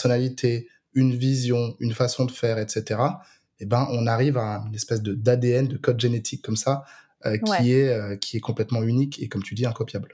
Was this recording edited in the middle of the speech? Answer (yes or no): no